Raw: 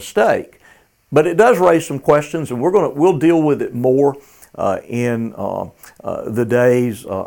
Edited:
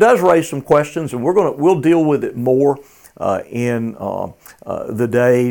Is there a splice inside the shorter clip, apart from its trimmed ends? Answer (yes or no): no